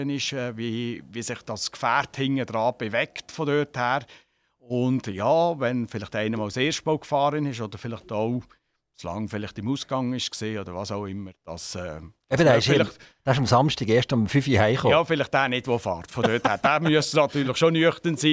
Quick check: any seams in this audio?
no; 0 cuts

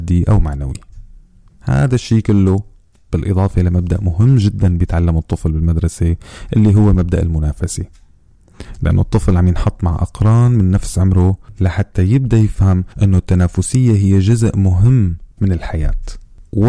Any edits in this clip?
yes; 1 cut; at 15.3 s

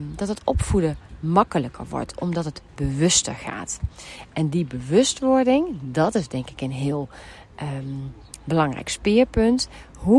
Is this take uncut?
yes; 0 cuts

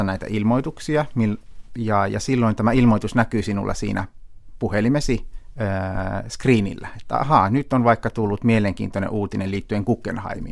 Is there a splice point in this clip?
no; 0 cuts

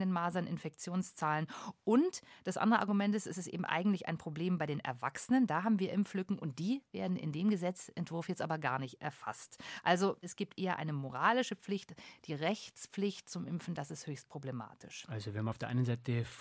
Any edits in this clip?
no; 0 cuts

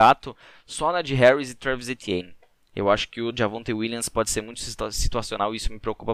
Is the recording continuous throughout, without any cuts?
yes; 0 cuts

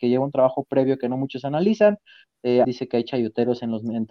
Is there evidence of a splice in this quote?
yes; 1 cut; at 2.6 s

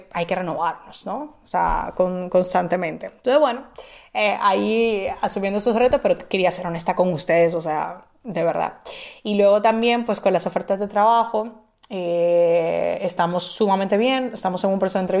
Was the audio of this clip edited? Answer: no; 0 cuts

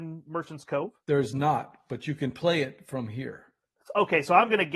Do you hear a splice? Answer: no; 0 cuts

